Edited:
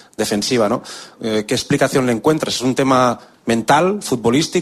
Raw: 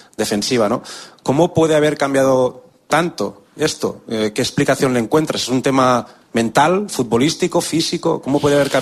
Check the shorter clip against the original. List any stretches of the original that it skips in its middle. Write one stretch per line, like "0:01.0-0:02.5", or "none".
0:01.2-0:04.0